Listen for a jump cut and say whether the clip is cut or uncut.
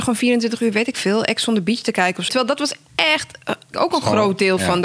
cut